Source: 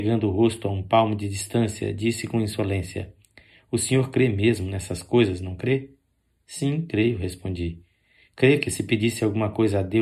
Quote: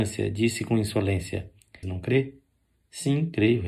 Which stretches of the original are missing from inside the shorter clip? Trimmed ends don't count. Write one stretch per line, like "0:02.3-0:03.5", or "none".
0:03.5-0:05.4